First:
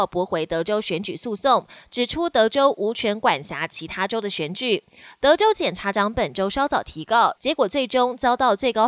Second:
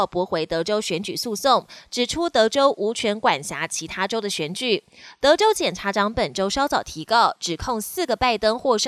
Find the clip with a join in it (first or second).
first